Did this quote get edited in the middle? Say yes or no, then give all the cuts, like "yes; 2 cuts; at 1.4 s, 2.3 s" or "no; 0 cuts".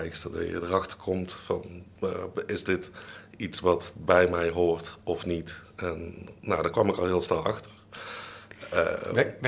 no; 0 cuts